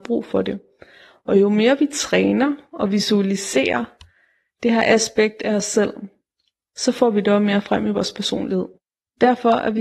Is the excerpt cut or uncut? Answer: uncut